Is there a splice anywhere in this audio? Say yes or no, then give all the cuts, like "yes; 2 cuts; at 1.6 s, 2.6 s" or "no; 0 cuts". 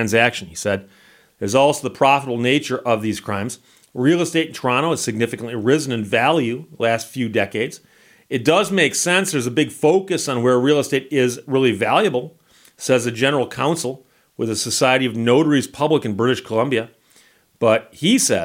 no; 0 cuts